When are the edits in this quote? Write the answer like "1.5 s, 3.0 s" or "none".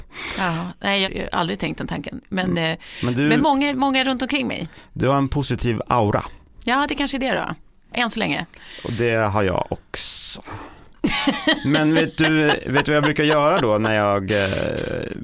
none